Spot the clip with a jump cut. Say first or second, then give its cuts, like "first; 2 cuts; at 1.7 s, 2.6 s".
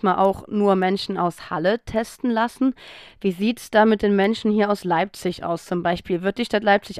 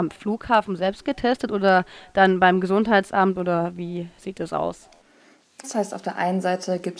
second; 1 cut; at 5.6 s